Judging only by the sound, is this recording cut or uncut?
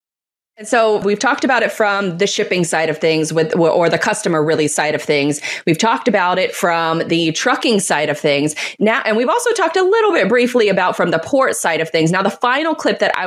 cut